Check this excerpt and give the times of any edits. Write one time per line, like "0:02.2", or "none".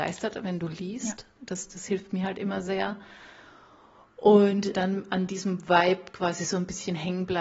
0:04.7